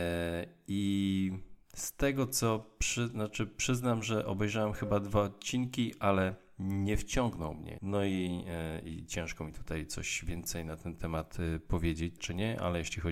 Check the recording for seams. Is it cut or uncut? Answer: cut